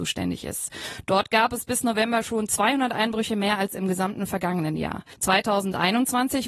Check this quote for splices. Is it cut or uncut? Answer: uncut